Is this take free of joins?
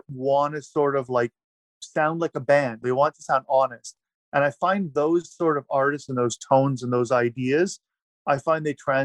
no; 1 cut; at 2.8 s

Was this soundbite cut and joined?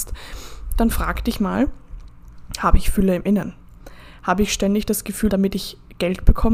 yes; 1 cut; at 5.3 s

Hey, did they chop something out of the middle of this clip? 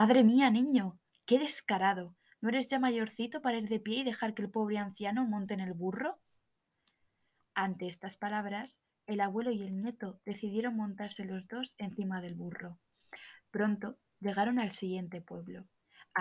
no; 0 cuts

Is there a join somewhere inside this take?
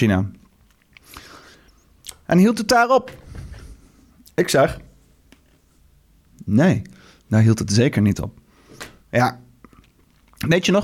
yes; 1 cut; at 9.0 s

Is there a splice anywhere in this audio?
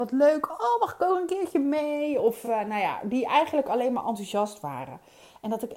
no; 0 cuts

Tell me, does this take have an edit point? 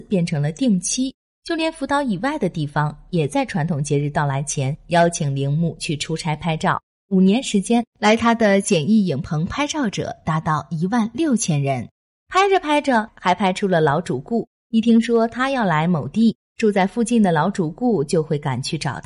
no; 0 cuts

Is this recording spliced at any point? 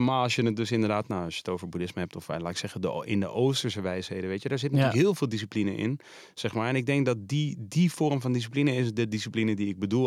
no; 0 cuts

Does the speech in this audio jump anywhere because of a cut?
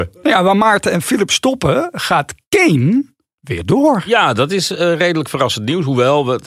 no; 0 cuts

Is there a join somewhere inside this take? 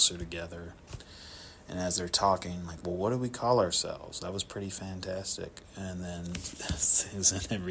no; 0 cuts

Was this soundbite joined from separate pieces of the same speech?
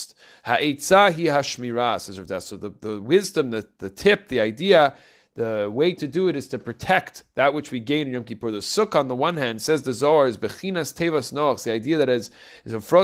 no; 0 cuts

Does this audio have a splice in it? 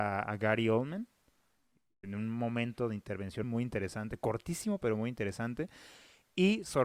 yes; 1 cut; at 3.4 s

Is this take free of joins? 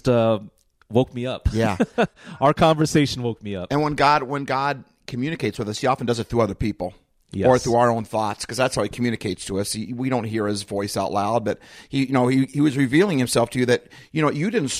yes; 0 cuts

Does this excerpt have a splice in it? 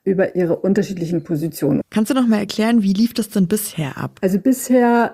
no; 0 cuts

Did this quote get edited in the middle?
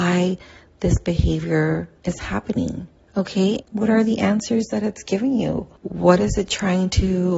yes; 2 cuts; at 3.6 s, 5.8 s

